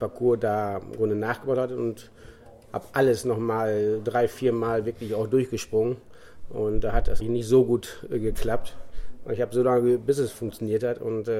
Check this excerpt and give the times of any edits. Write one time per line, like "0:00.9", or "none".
0:07.2